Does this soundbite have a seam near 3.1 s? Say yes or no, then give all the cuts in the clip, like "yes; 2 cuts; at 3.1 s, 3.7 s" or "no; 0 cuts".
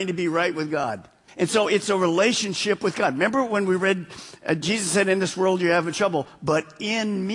no; 1 cut; at 1.3 s